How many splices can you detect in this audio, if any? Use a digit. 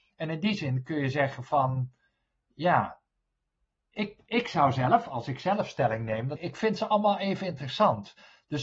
1